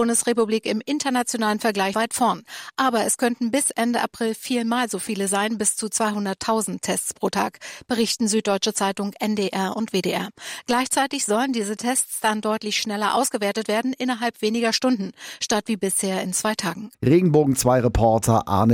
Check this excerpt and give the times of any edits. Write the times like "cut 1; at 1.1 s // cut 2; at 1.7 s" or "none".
cut 1; at 1.9 s // cut 2; at 16.9 s

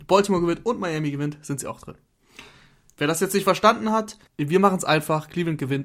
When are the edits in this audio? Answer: cut 1; at 4.3 s

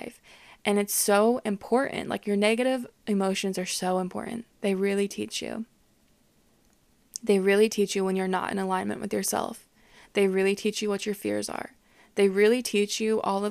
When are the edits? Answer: none

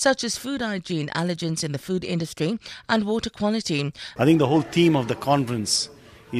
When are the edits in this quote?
cut 1; at 4.2 s

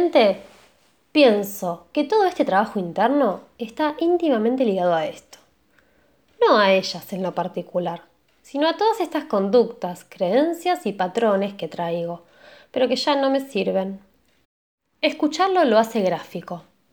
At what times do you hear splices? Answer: none

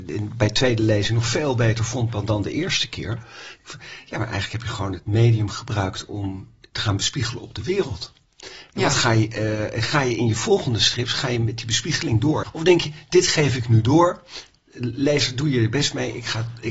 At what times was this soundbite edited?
none

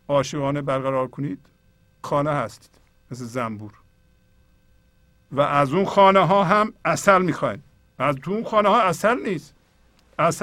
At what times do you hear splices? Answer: cut 1; at 2.0 s

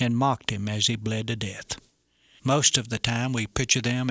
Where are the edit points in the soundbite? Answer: cut 1; at 2.4 s

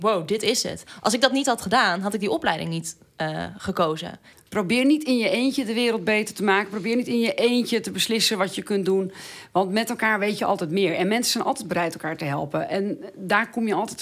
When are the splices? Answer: cut 1; at 4.3 s

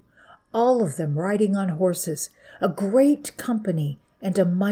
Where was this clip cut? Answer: none

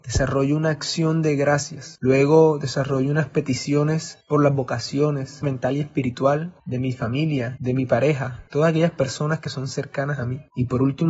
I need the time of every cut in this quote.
cut 1; at 2.0 s // cut 2; at 5.4 s // cut 3; at 7.6 s

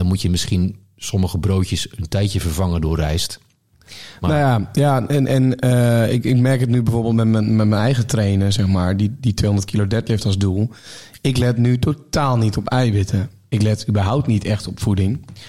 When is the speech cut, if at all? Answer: none

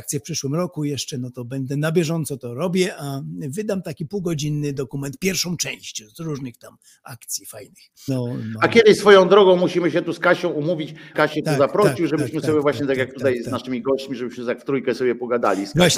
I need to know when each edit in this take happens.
cut 1; at 8.1 s // cut 2; at 11.1 s

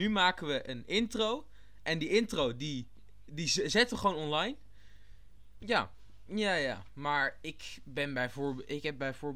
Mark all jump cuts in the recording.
cut 1; at 5.6 s

